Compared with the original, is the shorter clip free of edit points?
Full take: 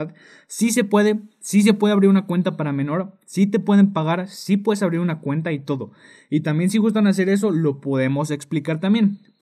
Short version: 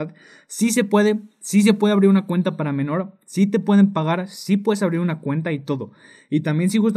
yes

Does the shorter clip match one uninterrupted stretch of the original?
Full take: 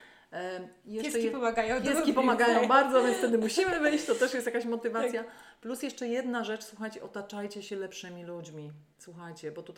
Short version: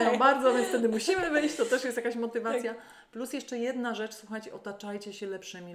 yes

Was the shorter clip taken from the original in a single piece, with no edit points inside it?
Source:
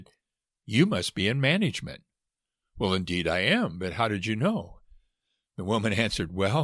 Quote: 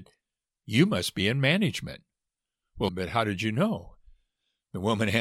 no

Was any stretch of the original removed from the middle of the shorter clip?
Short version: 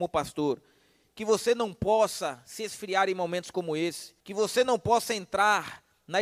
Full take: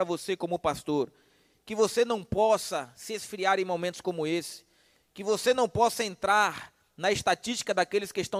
yes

